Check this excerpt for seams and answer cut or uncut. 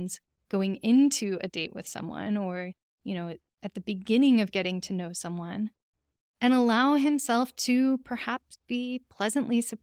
uncut